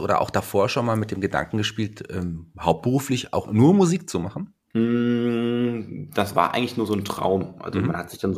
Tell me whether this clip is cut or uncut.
cut